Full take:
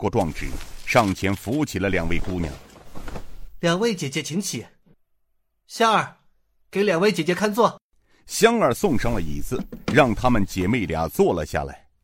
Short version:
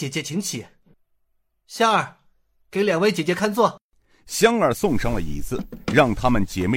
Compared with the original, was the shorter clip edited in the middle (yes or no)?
no